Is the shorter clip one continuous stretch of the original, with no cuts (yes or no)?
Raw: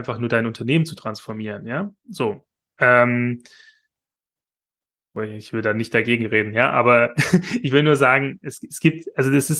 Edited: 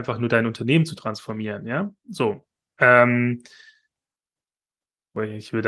yes